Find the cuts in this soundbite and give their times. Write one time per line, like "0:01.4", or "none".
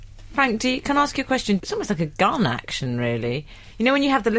0:01.6